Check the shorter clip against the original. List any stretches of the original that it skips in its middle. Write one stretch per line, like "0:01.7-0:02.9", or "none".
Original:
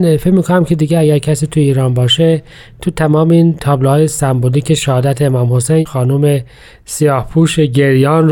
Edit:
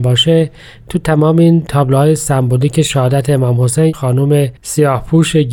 0:06.5-0:06.8